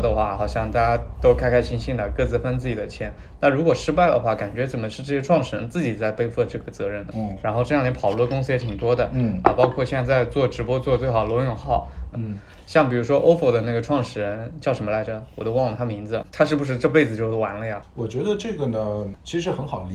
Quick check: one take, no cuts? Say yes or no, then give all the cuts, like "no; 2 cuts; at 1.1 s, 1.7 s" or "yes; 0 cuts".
no; 2 cuts; at 7.1 s, 12.1 s